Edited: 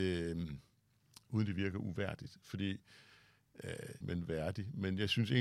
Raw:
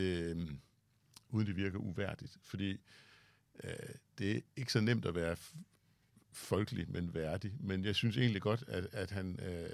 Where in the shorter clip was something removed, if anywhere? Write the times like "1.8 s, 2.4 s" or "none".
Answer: 4.0 s